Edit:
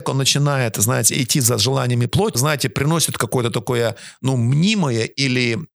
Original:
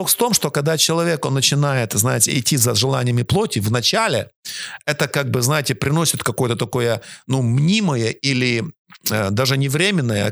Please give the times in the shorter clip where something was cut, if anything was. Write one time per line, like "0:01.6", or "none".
0:02.3